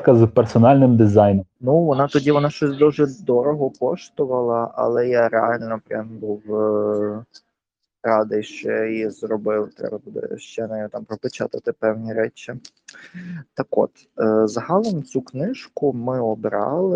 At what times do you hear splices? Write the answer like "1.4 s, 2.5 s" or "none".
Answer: 1.6 s